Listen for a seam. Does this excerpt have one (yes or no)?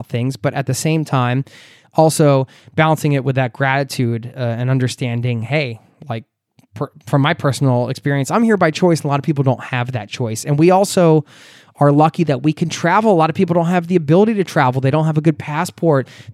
no